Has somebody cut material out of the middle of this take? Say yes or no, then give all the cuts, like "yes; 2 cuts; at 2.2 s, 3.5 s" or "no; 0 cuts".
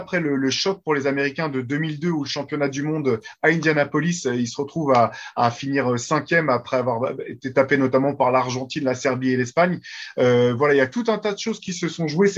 no; 0 cuts